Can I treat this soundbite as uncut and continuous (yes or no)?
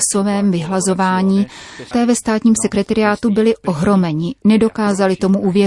no